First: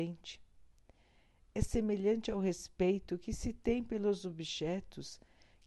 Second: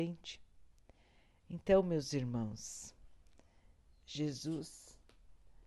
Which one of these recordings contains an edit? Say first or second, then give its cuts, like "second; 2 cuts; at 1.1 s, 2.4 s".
second; 1 cut; at 1.4 s